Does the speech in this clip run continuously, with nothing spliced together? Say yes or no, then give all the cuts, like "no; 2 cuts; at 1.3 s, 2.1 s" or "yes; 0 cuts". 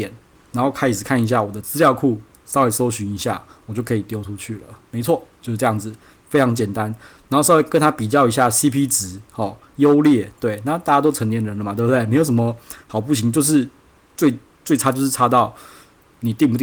yes; 0 cuts